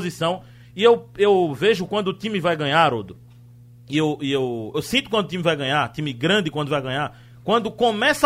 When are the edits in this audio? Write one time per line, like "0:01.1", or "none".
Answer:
0:04.7